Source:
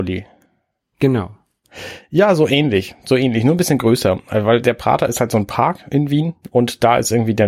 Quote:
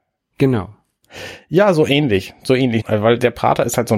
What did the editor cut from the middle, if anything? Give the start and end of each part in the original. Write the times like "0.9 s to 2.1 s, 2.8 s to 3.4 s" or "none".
3.4 s to 4.2 s